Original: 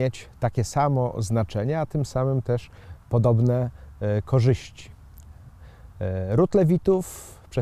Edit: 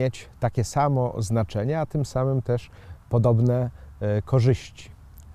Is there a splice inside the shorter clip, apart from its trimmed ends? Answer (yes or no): no